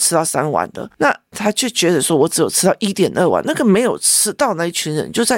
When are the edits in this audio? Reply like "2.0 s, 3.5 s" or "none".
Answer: none